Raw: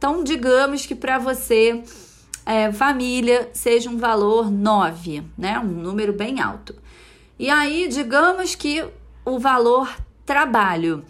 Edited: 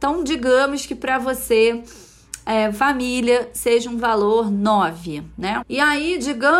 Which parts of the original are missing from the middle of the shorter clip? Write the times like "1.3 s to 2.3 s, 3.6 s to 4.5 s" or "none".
5.6 s to 7.3 s